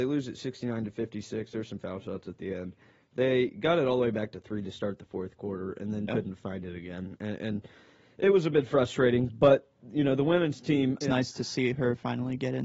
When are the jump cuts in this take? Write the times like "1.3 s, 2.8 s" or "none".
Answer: 6.1 s, 11.0 s